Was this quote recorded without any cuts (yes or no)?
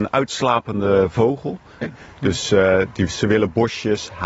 no